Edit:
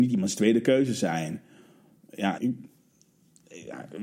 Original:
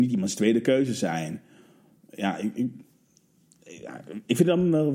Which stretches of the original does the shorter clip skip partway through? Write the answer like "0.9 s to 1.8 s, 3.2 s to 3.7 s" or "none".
2.4 s to 2.5 s